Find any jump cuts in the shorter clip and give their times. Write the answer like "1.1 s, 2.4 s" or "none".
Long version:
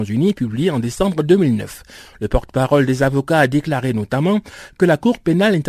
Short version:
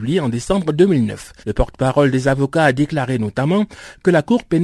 1.4 s